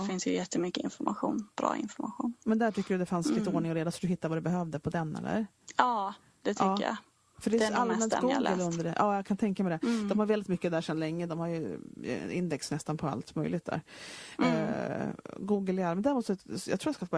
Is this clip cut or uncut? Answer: uncut